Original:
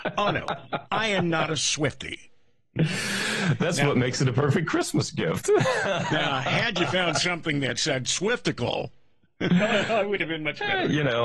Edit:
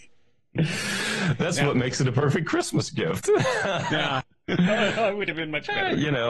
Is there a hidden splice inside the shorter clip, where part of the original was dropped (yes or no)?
yes